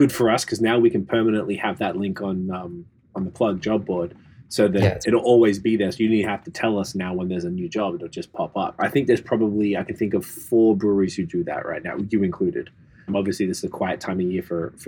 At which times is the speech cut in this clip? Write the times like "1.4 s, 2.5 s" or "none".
8.8 s, 13.1 s